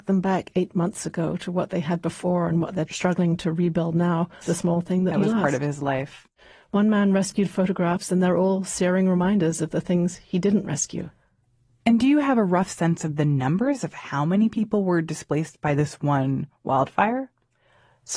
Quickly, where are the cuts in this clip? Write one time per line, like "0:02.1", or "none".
0:04.4